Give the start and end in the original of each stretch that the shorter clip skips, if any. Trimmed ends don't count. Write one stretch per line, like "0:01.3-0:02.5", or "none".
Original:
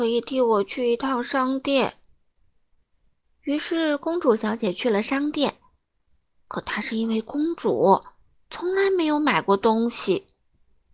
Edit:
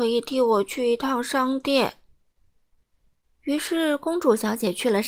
none